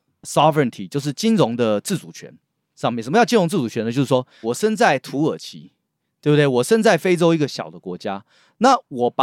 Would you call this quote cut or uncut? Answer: cut